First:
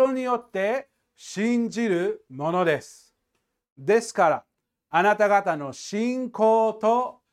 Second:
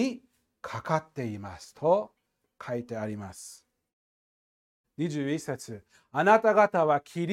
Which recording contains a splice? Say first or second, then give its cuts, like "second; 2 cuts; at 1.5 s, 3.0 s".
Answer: second; 1 cut; at 4.8 s